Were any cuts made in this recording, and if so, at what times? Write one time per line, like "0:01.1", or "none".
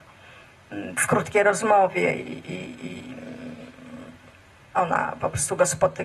none